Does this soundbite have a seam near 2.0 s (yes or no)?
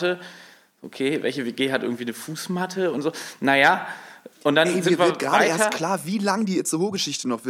no